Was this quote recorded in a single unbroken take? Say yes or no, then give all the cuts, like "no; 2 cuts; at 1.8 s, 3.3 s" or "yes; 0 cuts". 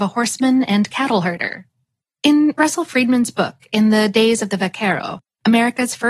no; 1 cut; at 2.1 s